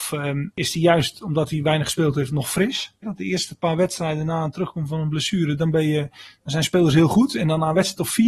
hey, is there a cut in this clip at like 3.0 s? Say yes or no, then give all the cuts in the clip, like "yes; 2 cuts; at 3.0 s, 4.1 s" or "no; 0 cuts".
yes; 1 cut; at 3.0 s